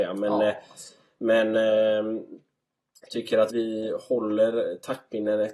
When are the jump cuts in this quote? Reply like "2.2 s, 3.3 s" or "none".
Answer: 3.5 s